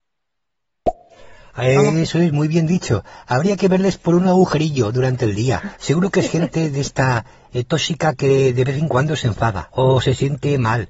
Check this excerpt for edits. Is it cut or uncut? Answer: cut